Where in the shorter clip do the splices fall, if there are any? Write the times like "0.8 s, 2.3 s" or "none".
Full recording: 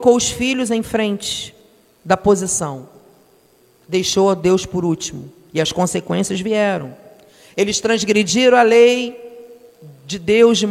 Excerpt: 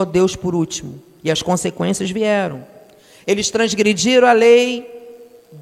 none